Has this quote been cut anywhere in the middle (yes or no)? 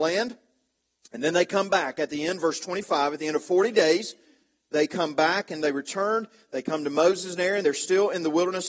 no